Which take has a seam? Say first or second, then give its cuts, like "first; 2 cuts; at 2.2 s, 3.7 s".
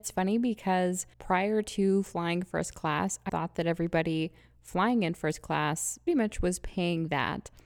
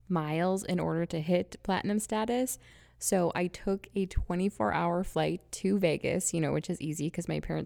first; 3 cuts; at 1.1 s, 3.3 s, 6.1 s